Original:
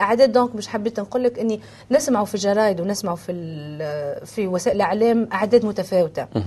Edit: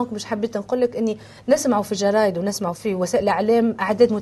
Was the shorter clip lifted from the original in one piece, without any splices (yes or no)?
no